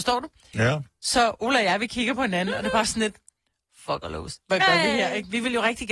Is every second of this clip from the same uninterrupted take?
yes; 0 cuts

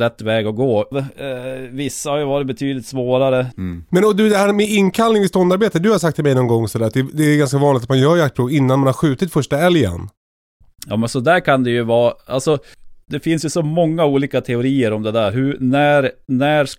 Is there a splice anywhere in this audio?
yes; 2 cuts; at 0.9 s, 3.5 s

